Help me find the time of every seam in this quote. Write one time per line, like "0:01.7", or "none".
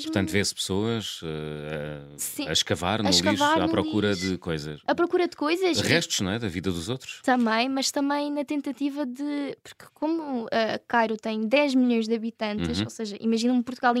none

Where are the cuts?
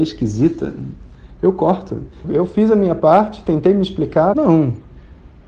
0:02.2
0:04.3

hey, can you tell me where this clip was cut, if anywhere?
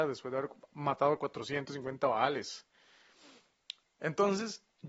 0:03.8

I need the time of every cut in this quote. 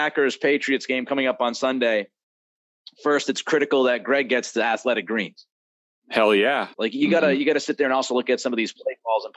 0:06.7

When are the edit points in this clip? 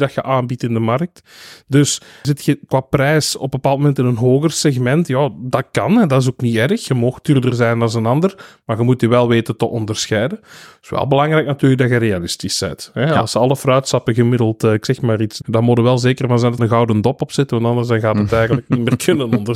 0:15.4
0:16.6

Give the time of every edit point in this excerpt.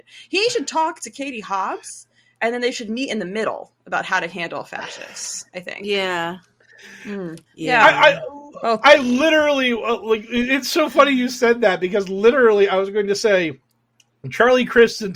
0:07.5

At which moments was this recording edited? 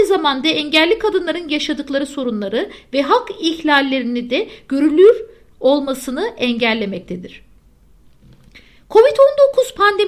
none

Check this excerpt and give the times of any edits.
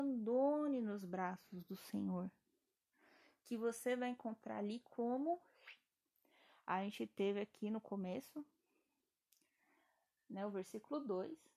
none

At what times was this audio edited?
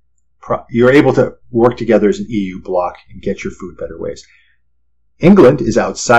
none

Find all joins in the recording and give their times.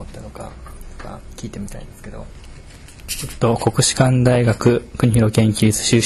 none

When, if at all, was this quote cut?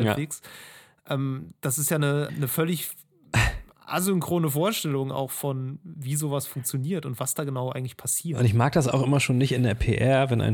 0:02.3

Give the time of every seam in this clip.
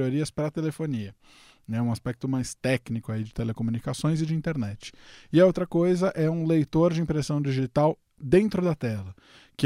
none

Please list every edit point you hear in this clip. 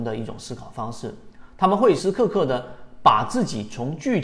0:02.0

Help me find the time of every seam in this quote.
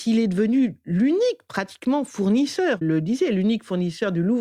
0:02.8

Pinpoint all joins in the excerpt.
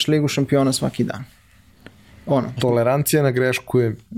0:02.6

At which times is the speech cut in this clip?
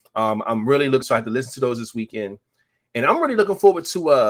0:01.0

